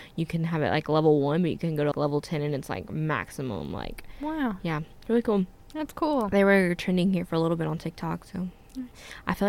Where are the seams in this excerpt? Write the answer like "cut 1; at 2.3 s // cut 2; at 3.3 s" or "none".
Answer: cut 1; at 1.9 s